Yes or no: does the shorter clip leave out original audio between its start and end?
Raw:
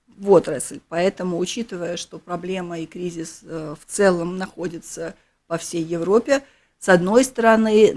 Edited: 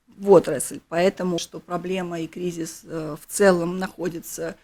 yes